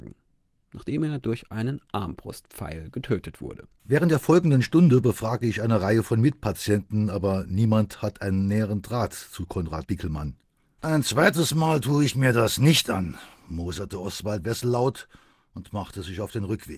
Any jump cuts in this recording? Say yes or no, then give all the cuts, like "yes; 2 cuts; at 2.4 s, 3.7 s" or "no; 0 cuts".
yes; 2 cuts; at 3.8 s, 10.8 s